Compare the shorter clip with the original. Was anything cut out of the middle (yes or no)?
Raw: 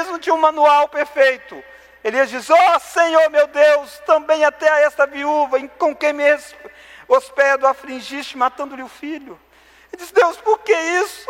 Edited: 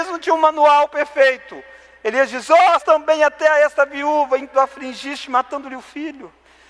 yes